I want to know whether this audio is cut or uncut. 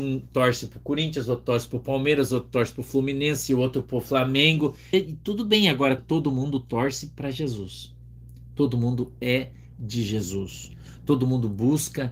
cut